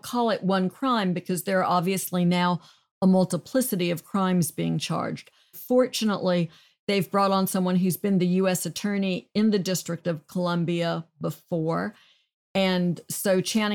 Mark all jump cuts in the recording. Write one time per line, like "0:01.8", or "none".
0:05.5